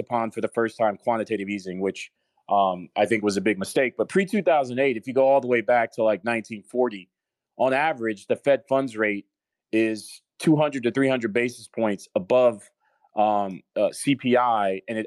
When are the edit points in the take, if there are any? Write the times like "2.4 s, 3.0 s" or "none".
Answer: none